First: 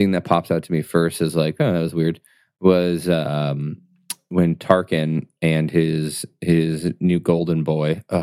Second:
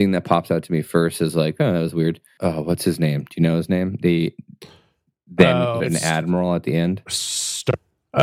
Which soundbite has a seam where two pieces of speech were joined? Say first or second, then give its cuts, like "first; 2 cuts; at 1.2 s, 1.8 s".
second; 2 cuts; at 2.4 s, 5.8 s